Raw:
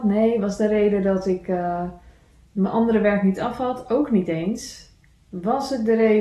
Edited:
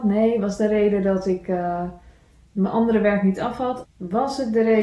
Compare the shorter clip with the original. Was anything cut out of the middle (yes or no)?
yes